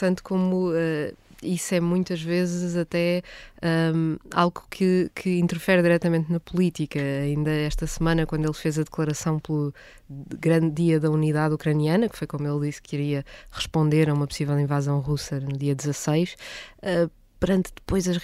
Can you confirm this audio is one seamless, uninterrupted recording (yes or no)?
yes